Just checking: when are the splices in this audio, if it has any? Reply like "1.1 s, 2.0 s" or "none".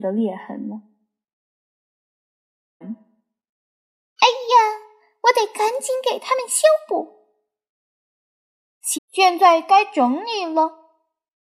2.8 s, 8.9 s